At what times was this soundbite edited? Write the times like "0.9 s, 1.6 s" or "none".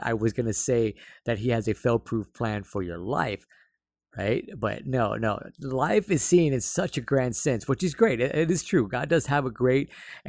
none

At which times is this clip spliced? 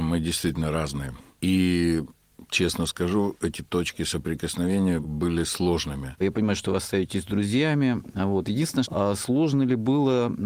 6.2 s, 8.8 s

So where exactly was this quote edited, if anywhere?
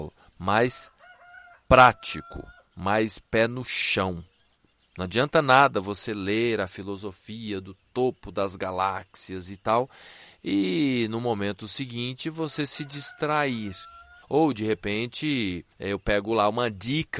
14.2 s, 15.7 s

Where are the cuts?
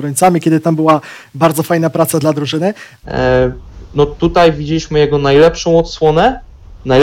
3.0 s

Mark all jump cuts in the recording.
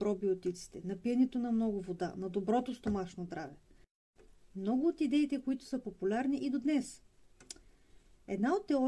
none

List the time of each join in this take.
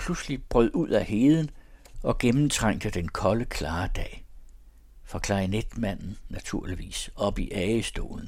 none

